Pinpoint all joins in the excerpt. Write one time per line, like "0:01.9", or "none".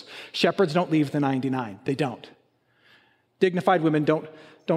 none